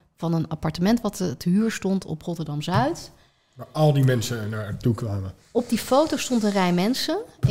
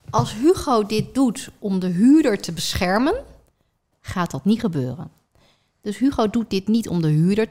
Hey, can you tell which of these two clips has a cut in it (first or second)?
second